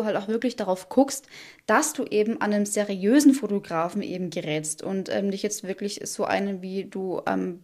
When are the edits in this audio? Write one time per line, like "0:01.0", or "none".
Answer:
none